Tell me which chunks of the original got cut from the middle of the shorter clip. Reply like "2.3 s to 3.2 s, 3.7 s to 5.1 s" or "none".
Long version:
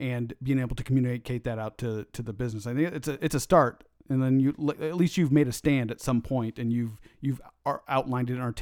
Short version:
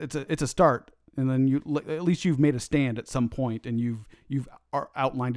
none